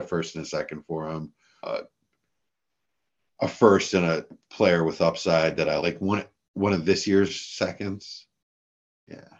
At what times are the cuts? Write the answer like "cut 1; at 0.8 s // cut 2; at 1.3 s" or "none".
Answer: cut 1; at 1.6 s // cut 2; at 5.8 s

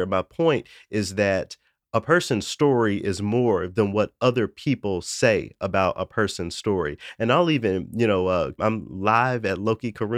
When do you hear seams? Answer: cut 1; at 8.6 s

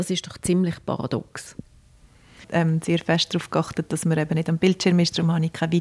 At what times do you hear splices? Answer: cut 1; at 2.4 s

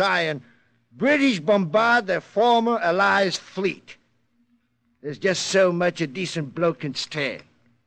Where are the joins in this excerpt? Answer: none

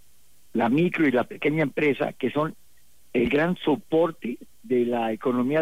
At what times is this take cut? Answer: none

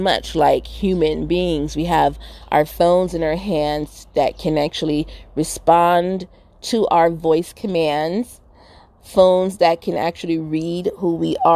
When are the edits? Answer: none

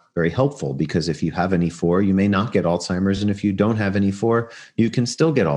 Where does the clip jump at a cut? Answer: none

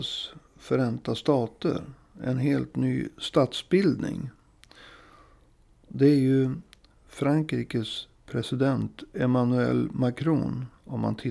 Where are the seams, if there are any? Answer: none

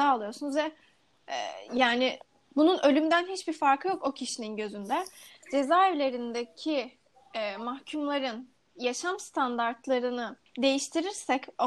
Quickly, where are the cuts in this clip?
cut 1; at 5.4 s // cut 2; at 10.5 s

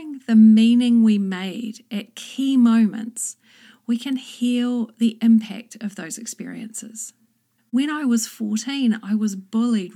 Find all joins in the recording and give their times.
cut 1; at 7.6 s

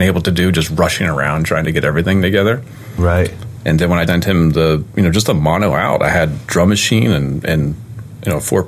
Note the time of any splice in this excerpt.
cut 1; at 4.1 s

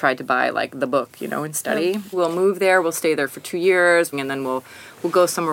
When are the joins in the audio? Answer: cut 1; at 2.1 s // cut 2; at 4.1 s

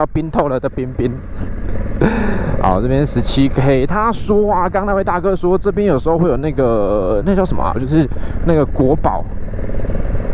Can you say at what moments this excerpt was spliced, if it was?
cut 1; at 7.7 s

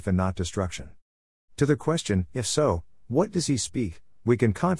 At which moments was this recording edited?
cut 1; at 1.4 s

